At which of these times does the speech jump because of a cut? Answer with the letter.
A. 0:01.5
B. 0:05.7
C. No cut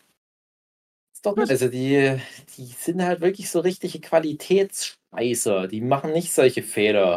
A